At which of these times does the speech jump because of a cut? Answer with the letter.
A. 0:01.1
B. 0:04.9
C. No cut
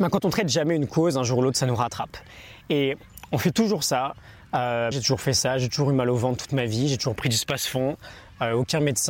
B